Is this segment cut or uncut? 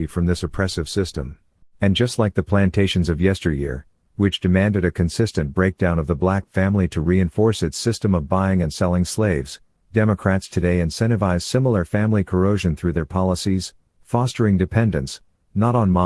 cut